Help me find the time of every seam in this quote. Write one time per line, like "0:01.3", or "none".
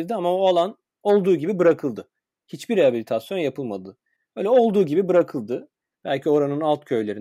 0:06.0